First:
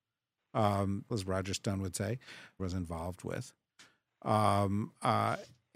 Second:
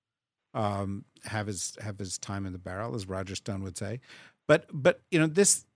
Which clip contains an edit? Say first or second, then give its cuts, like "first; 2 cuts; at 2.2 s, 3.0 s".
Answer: first; 2 cuts; at 1.1 s, 2.6 s